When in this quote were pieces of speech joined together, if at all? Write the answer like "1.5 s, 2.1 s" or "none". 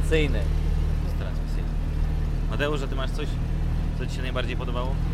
none